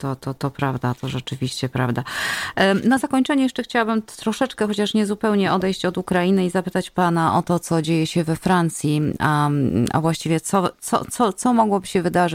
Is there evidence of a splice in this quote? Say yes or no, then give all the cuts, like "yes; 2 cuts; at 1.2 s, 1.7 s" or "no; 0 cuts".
no; 0 cuts